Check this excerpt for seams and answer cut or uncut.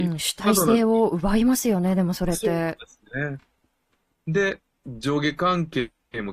uncut